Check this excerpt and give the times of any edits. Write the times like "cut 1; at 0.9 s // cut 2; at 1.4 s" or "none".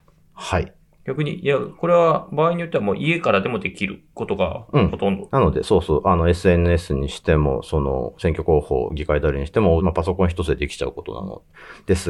cut 1; at 5.3 s // cut 2; at 9.8 s